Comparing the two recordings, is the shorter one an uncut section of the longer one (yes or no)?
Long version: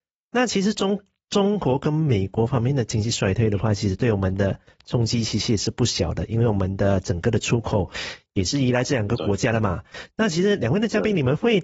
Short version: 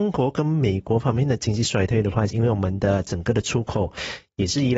no